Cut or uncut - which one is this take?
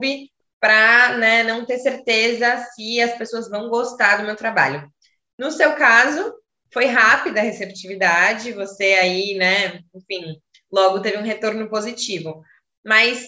uncut